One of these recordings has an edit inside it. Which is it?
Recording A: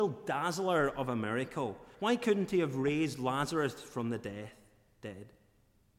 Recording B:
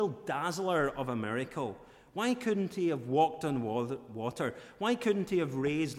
A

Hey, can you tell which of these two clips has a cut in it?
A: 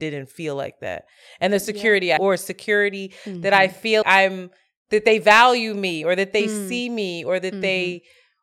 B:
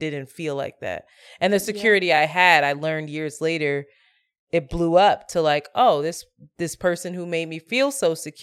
A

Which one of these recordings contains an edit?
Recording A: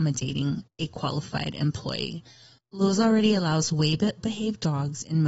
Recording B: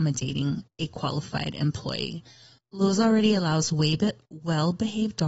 A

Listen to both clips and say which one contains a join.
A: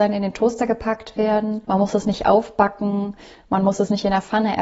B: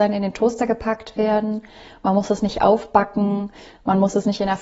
A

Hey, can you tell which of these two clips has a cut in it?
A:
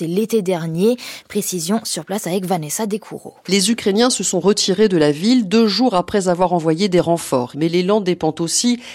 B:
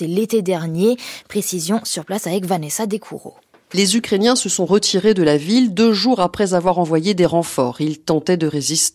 A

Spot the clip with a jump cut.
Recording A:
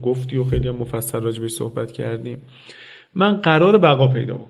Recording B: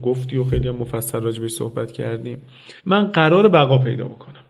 B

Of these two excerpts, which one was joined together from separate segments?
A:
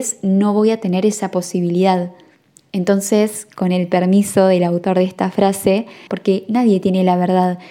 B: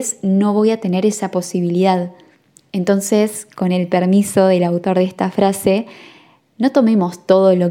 A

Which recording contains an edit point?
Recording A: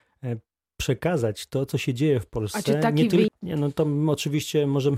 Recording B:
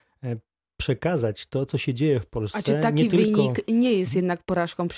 A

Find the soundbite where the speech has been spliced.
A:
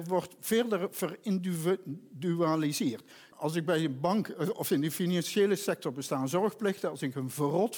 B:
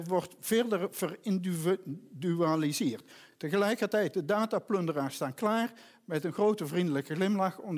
A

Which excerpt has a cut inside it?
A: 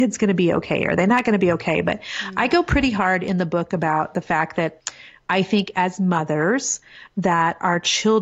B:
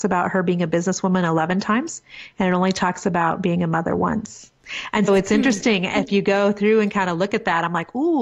B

